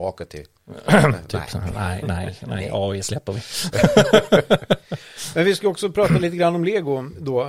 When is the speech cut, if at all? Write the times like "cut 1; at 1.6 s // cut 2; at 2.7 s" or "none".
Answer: none